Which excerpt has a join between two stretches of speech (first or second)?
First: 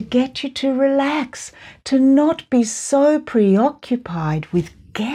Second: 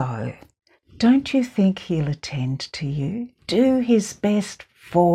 second